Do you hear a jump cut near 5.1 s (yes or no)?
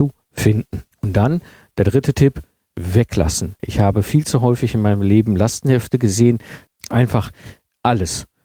no